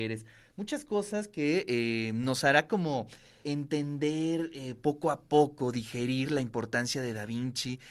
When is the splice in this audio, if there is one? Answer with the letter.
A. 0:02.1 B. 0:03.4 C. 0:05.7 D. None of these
B